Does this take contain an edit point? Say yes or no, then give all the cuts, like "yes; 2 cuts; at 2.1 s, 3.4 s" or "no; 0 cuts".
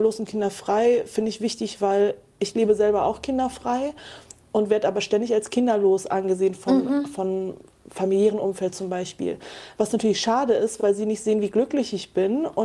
no; 0 cuts